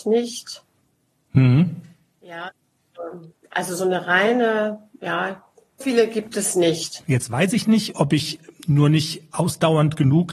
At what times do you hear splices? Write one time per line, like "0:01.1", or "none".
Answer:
0:05.8
0:07.0